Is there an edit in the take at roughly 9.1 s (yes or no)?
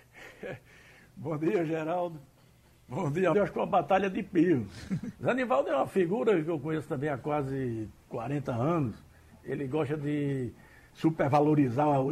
no